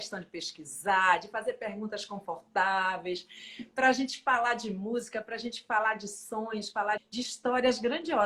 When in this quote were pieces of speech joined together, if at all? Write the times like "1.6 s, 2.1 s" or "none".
7.0 s